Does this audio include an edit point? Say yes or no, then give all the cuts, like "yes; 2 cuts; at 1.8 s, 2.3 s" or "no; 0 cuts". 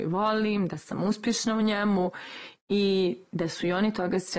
no; 0 cuts